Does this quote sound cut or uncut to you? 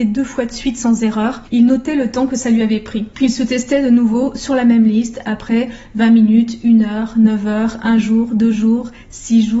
uncut